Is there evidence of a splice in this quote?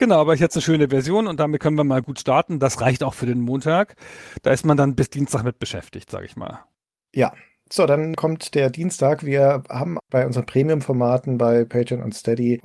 no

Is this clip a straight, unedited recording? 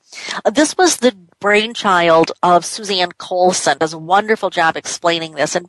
no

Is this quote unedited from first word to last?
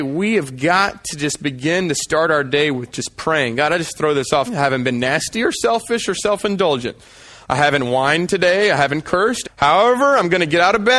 no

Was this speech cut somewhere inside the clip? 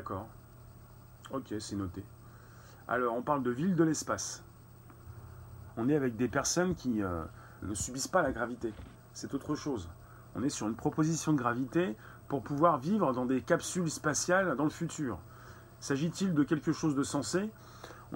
yes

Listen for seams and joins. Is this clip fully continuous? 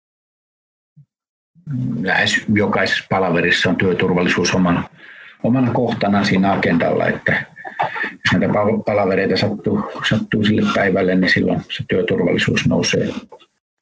yes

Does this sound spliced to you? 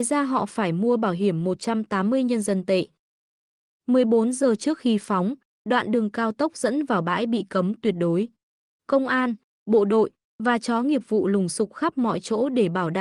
no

